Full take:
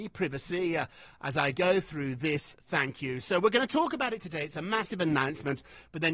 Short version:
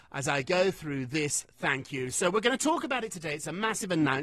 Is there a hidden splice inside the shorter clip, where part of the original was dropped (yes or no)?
no